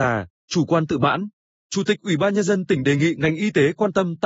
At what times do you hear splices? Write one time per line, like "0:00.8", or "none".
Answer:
none